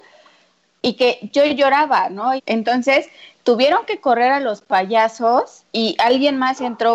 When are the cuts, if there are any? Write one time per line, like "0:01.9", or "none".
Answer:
0:02.4
0:05.7